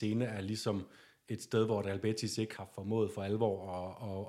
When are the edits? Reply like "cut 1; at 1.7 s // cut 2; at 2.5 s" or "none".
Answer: cut 1; at 2.6 s